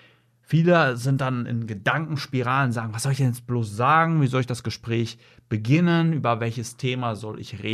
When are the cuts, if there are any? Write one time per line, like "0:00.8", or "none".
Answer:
none